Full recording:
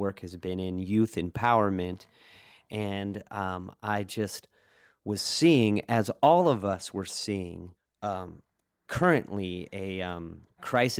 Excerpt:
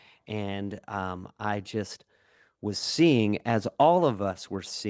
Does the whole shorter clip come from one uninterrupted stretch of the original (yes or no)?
yes